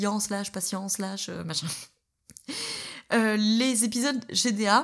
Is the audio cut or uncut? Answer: uncut